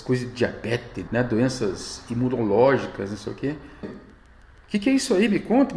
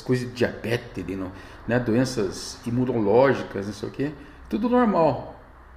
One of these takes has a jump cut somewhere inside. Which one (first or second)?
first